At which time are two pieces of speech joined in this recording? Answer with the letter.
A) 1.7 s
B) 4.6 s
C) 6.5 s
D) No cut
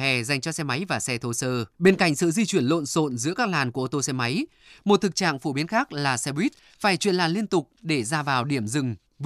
A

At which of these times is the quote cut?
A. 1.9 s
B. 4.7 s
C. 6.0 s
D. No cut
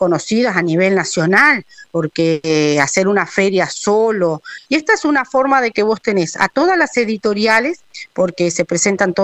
B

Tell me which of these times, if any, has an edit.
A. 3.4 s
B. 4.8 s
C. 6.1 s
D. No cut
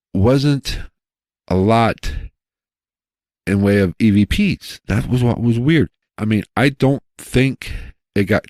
C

